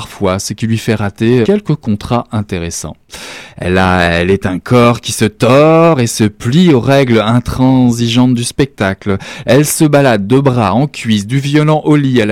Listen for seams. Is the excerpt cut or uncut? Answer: cut